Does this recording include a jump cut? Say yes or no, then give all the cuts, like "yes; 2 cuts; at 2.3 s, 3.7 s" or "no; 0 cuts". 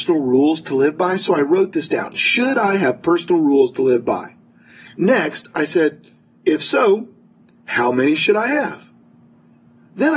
no; 0 cuts